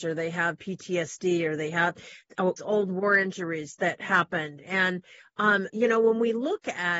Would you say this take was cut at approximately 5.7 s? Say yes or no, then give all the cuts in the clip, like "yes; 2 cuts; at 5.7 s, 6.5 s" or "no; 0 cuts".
yes; 2 cuts; at 2.6 s, 5.7 s